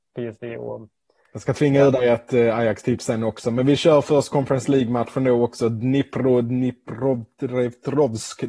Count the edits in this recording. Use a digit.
0